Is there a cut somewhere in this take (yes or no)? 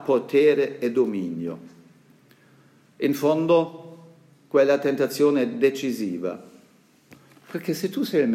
no